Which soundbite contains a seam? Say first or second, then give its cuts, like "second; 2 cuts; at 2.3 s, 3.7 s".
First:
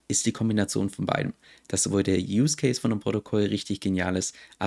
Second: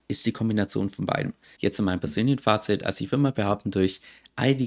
second; 1 cut; at 1.6 s